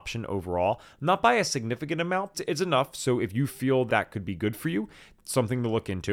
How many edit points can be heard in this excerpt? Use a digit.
2